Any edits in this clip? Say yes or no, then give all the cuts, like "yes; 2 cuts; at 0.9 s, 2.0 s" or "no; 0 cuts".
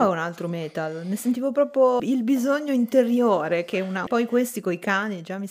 yes; 2 cuts; at 2.0 s, 4.1 s